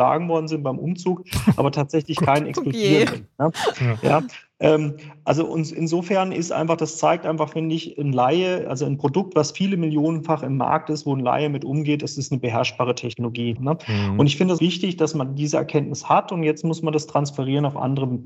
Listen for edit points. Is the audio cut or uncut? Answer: cut